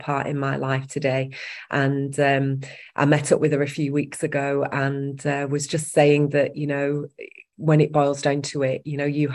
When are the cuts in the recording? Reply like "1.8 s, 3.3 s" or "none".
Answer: none